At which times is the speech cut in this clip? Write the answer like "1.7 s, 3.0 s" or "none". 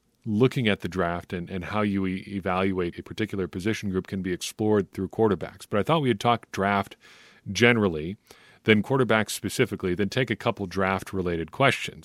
2.9 s